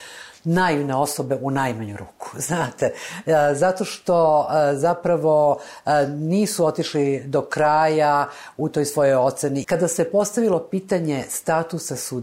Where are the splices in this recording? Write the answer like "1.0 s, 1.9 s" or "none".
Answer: 9.6 s

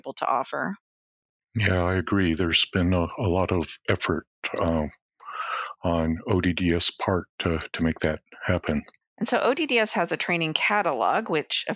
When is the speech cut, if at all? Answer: 9.0 s

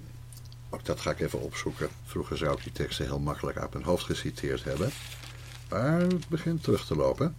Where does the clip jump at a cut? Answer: 2.0 s

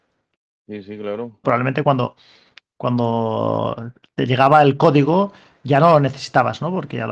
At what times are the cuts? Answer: 1.4 s

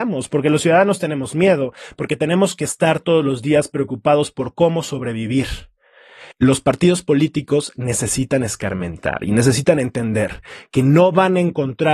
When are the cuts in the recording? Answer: 6.3 s

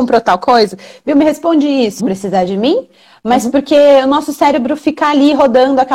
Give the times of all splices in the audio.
2.0 s

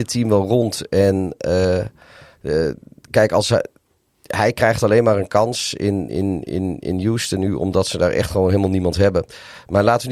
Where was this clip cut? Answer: 6.1 s

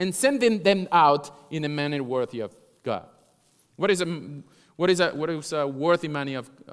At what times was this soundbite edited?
none

